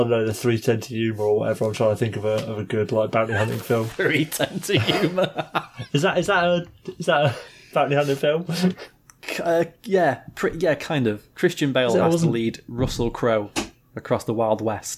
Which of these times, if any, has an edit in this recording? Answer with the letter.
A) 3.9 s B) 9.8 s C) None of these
C